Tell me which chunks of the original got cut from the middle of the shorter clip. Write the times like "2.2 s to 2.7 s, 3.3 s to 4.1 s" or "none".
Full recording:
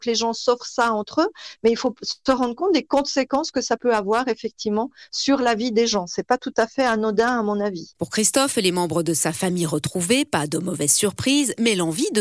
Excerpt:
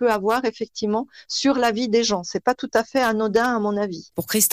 none

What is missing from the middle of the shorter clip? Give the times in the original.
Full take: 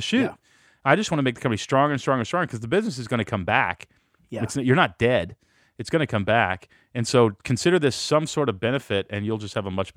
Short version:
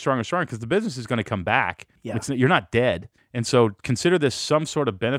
4.0 s to 4.2 s, 5.4 s to 6.8 s

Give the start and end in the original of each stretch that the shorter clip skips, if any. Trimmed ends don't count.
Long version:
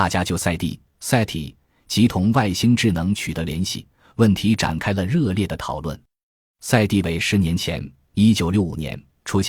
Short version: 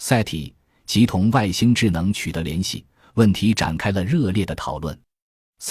none

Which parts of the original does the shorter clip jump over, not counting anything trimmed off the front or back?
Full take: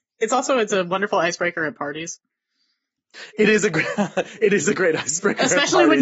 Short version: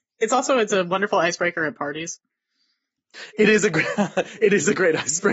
none

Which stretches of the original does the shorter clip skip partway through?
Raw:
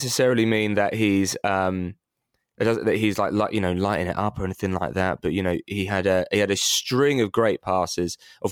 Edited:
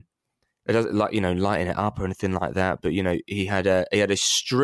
2.8 s to 3.3 s

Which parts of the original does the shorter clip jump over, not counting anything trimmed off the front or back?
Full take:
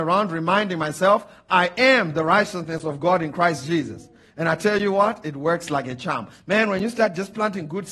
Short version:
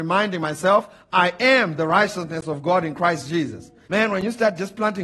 4.2 s to 6.4 s

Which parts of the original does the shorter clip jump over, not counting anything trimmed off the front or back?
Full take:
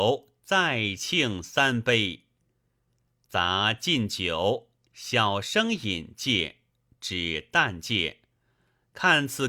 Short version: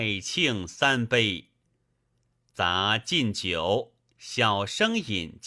none

